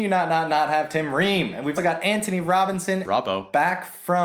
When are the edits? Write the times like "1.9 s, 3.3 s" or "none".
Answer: 1.8 s, 3.0 s